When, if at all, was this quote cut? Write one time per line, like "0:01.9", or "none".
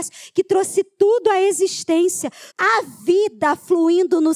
0:02.5